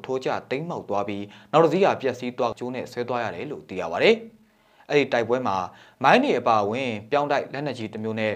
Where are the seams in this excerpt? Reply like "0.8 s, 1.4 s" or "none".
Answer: 2.5 s